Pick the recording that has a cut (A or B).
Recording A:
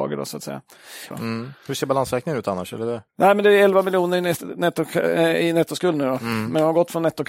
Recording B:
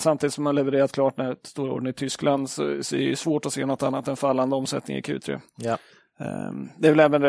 A